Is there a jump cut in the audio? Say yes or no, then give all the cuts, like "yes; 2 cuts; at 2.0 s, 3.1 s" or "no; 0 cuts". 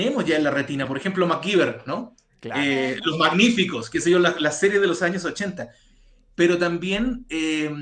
no; 0 cuts